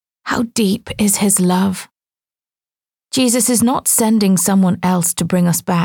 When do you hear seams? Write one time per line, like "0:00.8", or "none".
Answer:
none